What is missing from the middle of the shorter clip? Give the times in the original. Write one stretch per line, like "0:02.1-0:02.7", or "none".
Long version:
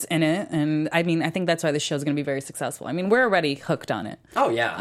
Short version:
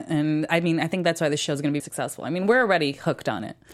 0:02.2-0:02.4